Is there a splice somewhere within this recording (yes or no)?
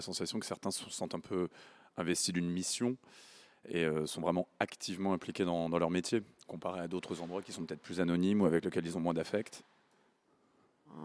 no